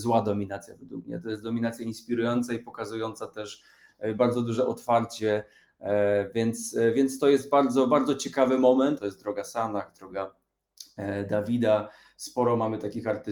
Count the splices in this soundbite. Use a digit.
1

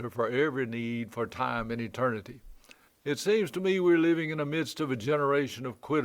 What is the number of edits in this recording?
1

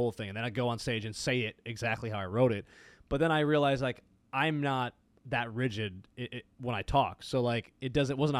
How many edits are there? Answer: 0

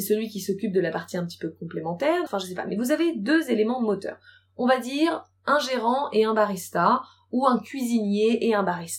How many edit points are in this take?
1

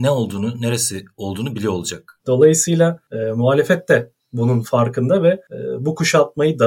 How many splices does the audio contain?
1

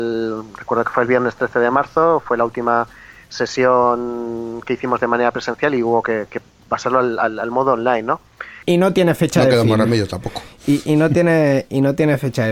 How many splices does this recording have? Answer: 1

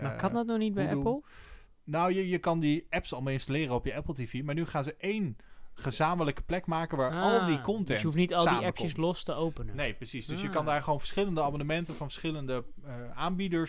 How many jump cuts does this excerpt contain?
0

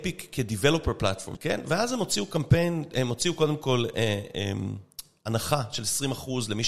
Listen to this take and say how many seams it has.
1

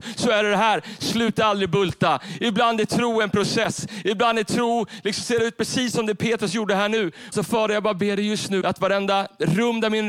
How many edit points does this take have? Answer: 2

